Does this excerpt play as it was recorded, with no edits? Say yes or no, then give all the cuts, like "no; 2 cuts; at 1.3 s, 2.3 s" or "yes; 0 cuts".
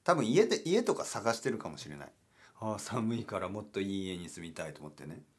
yes; 0 cuts